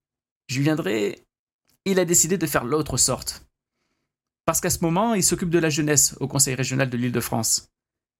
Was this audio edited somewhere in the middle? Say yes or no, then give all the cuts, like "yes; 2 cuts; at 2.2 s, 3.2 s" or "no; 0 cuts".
no; 0 cuts